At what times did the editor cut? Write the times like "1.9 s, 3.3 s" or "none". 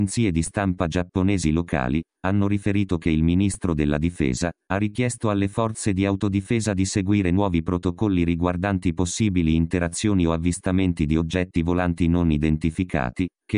4.6 s

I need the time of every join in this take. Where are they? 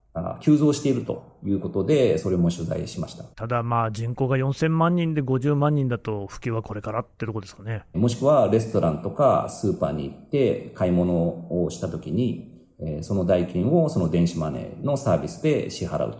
3.3 s, 7.9 s

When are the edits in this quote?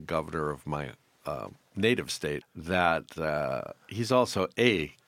2.4 s

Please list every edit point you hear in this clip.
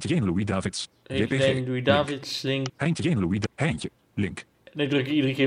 2.7 s

